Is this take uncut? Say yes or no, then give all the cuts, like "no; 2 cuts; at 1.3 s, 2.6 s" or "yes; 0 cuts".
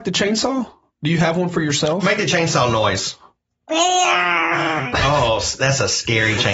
yes; 0 cuts